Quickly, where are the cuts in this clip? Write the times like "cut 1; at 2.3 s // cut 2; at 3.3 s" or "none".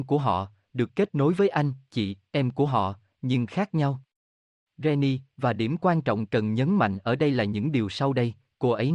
none

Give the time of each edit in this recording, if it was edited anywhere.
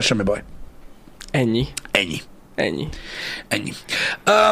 none

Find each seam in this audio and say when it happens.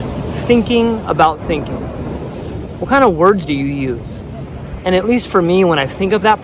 cut 1; at 4.8 s

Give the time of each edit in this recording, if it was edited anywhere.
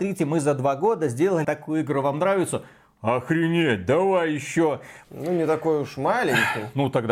cut 1; at 1.4 s // cut 2; at 5.0 s

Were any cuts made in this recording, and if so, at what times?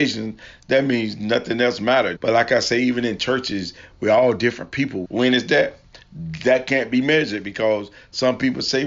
cut 1; at 2.2 s // cut 2; at 5.0 s

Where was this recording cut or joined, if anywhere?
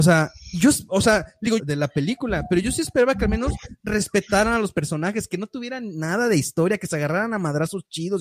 cut 1; at 1.6 s

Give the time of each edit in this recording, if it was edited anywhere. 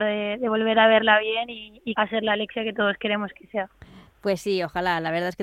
cut 1; at 1.9 s

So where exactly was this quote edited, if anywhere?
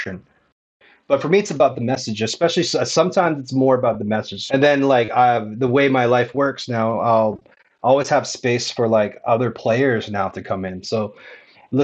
cut 1; at 4.5 s // cut 2; at 10.8 s

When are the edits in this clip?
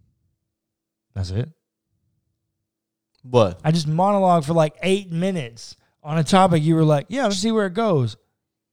cut 1; at 7.3 s

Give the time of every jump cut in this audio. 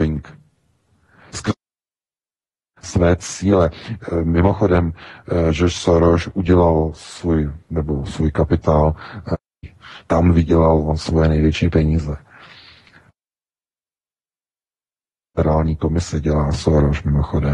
none

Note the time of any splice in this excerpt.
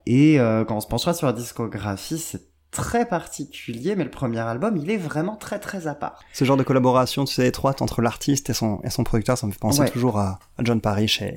none

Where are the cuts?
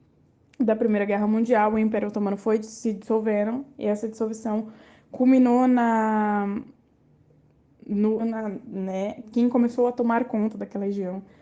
cut 1; at 8.2 s // cut 2; at 9.2 s

